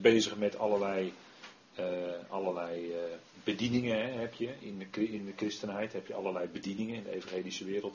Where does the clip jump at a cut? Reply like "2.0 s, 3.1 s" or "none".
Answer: none